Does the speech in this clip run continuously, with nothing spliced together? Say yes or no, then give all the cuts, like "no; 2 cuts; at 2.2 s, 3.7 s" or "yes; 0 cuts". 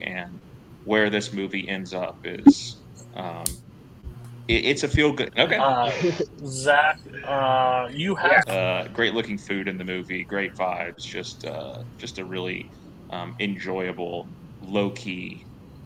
no; 2 cuts; at 5.3 s, 8.4 s